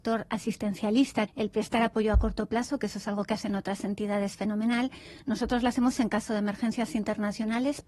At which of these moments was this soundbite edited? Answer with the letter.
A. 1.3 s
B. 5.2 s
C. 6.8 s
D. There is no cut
A